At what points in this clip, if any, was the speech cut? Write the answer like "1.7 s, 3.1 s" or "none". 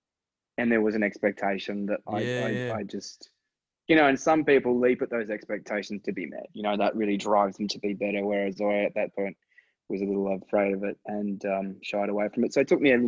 none